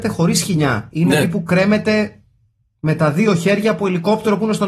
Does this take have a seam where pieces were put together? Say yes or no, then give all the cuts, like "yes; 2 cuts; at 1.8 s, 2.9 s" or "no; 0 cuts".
no; 0 cuts